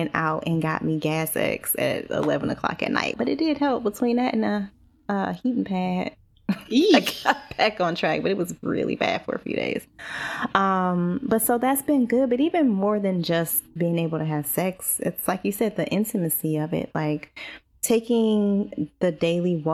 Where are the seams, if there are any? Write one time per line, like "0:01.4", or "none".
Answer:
0:03.1